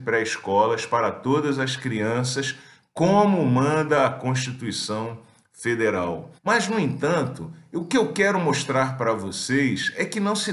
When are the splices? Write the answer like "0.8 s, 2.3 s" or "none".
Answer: 6.4 s